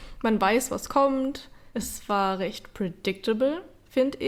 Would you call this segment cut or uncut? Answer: uncut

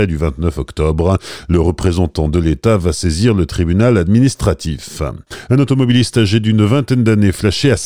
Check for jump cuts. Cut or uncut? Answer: cut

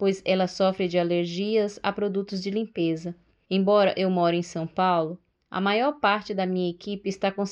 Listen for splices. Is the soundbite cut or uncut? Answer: cut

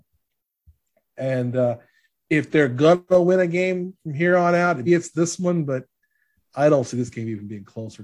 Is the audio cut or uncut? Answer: cut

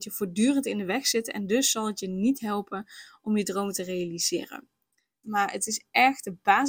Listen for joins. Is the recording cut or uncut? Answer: cut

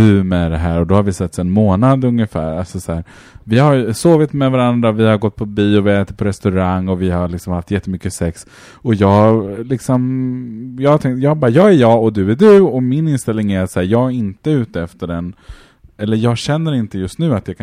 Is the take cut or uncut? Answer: uncut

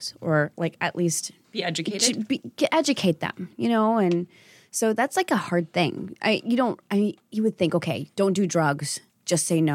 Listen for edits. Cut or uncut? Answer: uncut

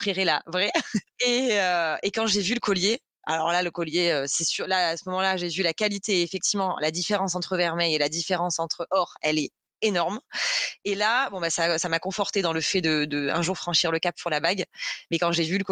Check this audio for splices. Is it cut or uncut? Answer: uncut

